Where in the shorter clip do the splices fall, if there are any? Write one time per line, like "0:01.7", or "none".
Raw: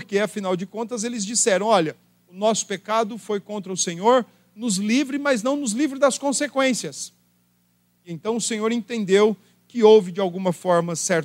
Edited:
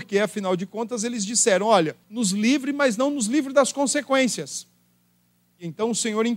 0:02.0